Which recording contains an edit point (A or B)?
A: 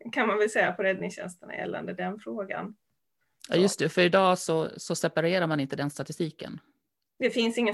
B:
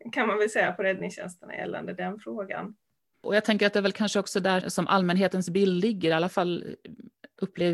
B